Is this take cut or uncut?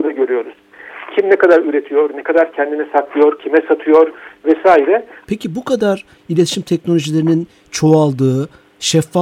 cut